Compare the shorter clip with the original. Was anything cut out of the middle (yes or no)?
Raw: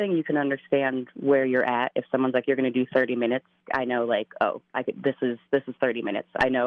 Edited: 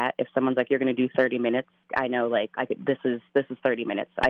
yes